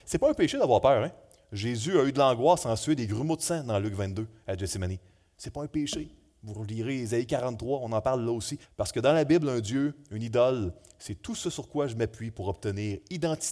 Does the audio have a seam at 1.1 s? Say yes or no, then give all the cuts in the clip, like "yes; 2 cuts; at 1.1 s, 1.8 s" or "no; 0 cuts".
no; 1 cut; at 8.6 s